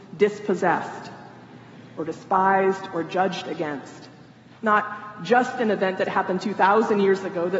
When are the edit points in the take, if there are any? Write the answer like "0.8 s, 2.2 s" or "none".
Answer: 4.6 s